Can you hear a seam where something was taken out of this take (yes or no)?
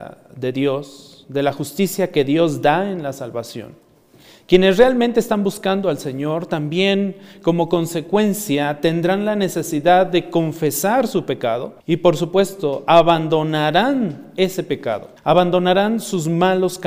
yes